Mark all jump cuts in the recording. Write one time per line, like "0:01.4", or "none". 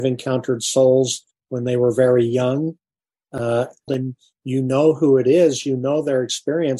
0:03.9